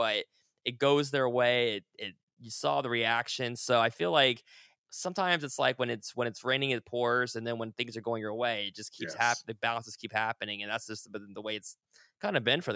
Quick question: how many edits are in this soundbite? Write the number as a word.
zero